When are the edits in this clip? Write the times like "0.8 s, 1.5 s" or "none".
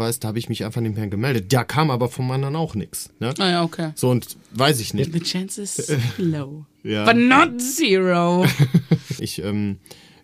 5.0 s, 9.2 s